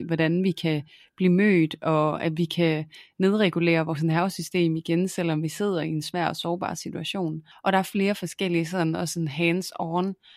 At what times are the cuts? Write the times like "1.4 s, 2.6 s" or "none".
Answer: 7.5 s